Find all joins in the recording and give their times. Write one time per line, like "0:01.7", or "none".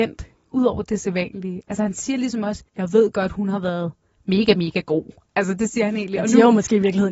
0:02.7